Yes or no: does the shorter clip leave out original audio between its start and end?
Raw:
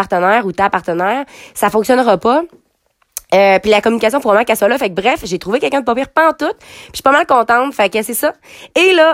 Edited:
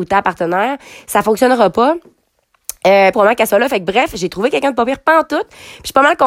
yes